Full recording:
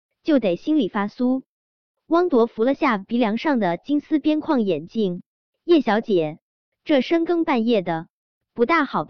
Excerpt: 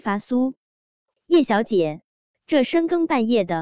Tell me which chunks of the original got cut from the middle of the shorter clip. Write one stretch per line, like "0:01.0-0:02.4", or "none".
0:02.0-0:05.5

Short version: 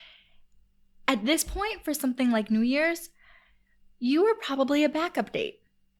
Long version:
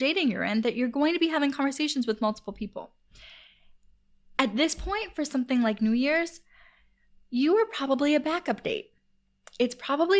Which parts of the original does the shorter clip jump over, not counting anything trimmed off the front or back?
none

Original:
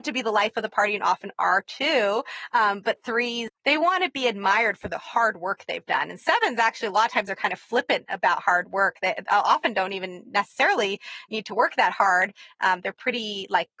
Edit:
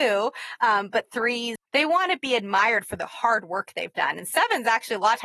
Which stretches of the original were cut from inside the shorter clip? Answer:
none

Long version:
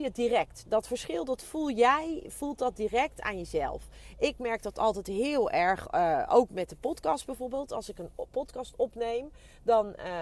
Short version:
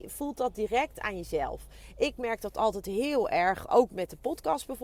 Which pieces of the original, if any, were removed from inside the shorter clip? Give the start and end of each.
0:05.9-0:06.3

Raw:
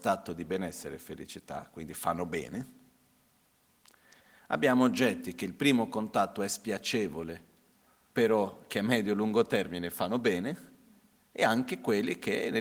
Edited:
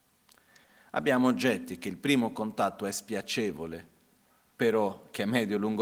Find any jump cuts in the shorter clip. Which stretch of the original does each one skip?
none

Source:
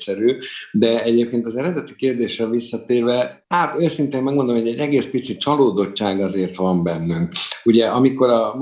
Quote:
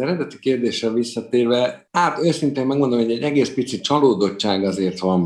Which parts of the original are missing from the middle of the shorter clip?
none

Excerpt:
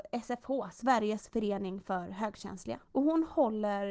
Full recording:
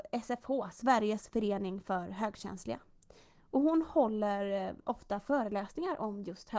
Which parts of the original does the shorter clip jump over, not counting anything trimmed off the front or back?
0:02.8-0:03.4

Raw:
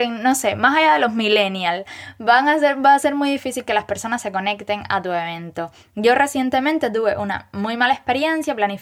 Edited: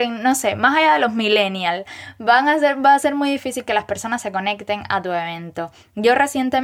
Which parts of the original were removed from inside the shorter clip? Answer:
none

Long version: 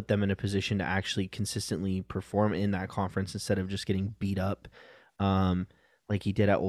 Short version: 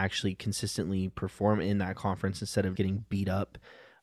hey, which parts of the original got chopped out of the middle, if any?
0:03.7-0:03.9

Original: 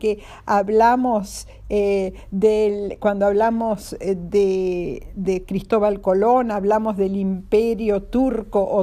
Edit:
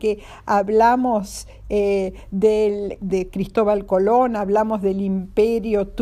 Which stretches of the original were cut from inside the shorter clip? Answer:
0:03.0-0:05.1

